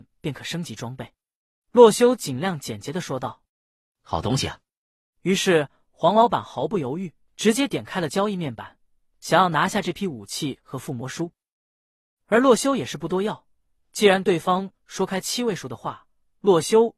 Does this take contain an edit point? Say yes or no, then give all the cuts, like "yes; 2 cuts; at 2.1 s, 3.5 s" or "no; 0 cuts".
yes; 2 cuts; at 3.5 s, 7.3 s